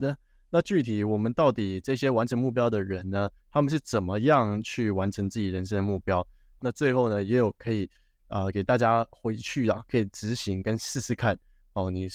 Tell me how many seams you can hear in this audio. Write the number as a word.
one